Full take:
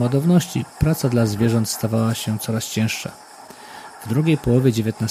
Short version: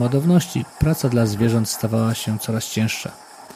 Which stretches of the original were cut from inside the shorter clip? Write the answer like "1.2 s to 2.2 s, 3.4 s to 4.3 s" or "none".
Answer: none